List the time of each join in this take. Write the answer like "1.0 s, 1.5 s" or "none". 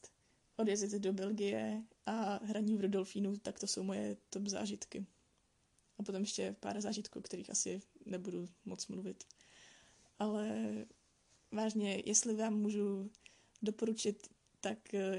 none